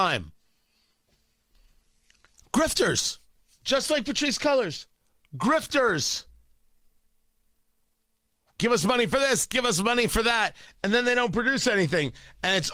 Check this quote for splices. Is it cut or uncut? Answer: uncut